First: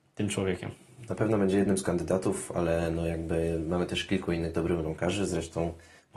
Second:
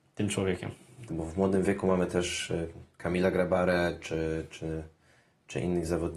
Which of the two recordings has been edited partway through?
second; 1 cut; at 1.1 s

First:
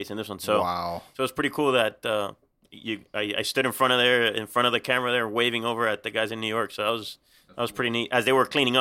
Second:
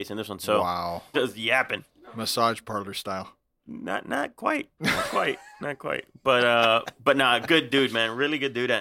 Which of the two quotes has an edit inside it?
second; 1 cut; at 1.1 s

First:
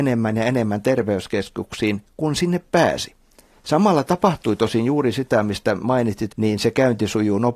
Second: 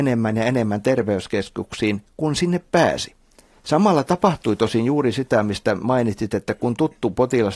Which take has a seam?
first; 1 cut; at 6.3 s

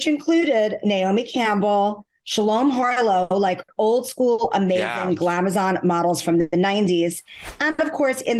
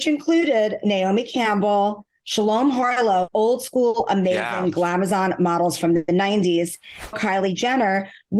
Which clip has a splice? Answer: second; 2 cuts; at 3.3 s, 7.1 s

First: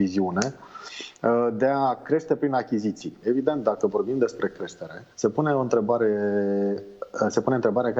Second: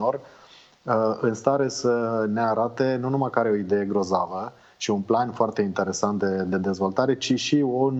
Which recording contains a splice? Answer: first; 2 cuts; at 3.2 s, 5.1 s

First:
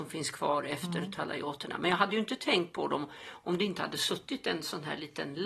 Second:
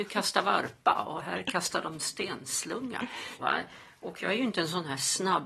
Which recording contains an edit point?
second; 1 cut; at 3.4 s

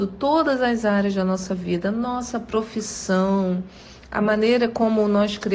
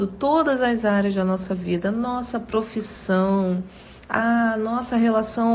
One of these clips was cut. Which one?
second; 1 cut; at 4.0 s

